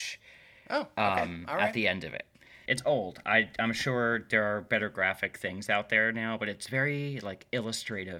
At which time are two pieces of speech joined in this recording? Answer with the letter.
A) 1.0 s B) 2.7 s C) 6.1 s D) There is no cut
B